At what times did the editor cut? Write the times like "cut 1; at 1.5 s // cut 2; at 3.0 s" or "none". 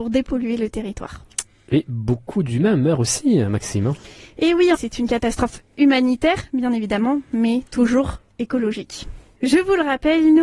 cut 1; at 4.7 s